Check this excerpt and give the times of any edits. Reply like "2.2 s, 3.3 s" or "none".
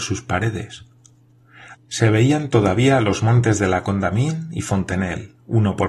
1.7 s